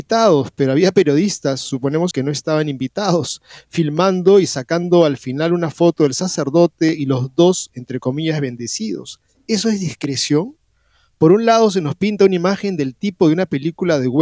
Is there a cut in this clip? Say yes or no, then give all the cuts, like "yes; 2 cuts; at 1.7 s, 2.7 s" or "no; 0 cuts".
yes; 1 cut; at 2.1 s